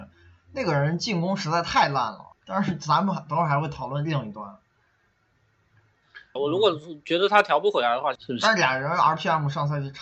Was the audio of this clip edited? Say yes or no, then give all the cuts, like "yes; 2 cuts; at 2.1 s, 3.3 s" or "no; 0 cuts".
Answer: yes; 3 cuts; at 2.3 s, 6.4 s, 8.2 s